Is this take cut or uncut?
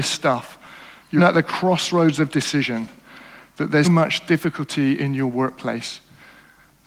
cut